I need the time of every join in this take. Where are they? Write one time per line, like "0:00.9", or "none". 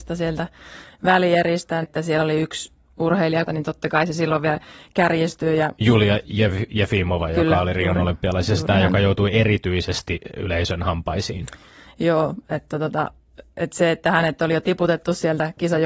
0:01.8
0:03.5